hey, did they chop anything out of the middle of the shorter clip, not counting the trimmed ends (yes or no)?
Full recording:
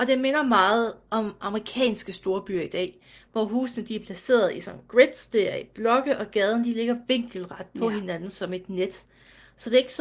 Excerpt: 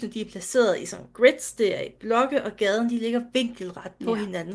no